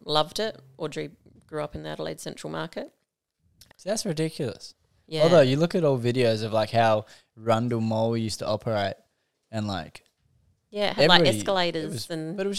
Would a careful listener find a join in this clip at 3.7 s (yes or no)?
yes